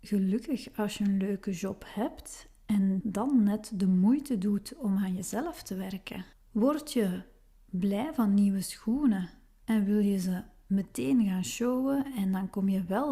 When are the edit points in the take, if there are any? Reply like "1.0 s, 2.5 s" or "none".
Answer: 3.0 s, 6.3 s